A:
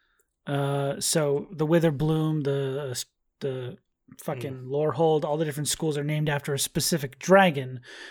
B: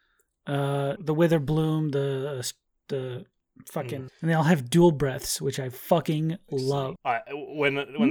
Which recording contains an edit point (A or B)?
B